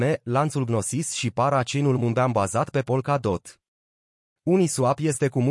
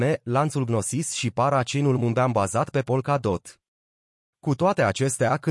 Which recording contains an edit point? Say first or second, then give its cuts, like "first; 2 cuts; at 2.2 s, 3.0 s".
second; 1 cut; at 4.3 s